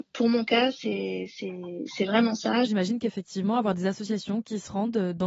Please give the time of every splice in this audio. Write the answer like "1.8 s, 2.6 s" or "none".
2.6 s